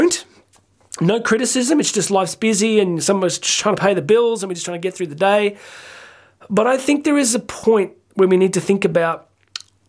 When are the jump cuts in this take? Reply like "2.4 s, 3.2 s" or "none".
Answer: none